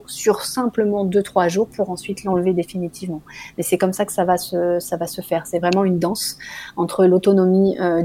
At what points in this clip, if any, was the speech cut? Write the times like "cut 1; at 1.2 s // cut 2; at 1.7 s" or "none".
none